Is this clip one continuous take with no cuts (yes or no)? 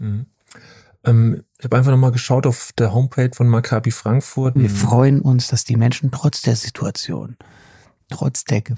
no